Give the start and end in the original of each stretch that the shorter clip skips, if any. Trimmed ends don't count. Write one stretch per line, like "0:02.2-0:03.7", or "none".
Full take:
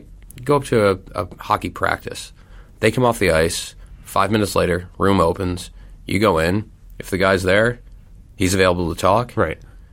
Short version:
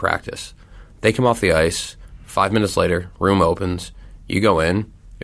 none